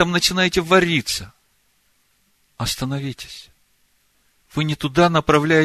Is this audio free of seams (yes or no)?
yes